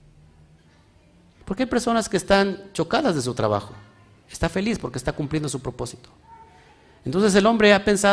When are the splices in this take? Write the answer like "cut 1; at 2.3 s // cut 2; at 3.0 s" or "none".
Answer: cut 1; at 1.4 s // cut 2; at 4.2 s